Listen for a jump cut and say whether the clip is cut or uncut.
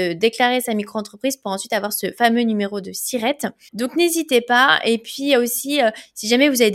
uncut